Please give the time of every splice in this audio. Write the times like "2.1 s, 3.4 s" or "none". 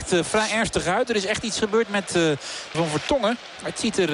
2.7 s